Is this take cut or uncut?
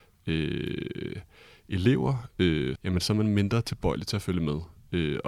cut